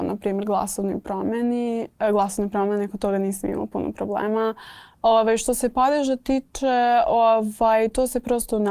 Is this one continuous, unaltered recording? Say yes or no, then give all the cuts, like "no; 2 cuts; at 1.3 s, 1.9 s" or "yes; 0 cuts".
yes; 0 cuts